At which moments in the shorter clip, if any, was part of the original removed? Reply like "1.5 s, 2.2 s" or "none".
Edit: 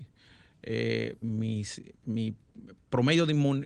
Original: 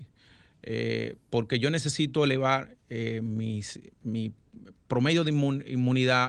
1.2 s